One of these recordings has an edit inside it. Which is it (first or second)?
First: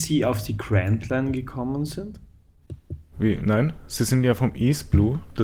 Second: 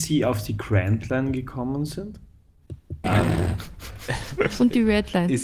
second